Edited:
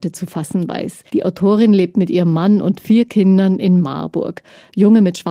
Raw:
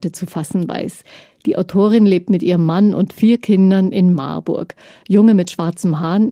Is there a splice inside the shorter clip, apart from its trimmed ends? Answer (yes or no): yes